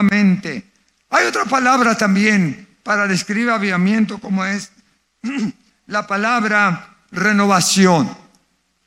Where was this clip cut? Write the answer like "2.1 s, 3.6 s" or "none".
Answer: 1.0 s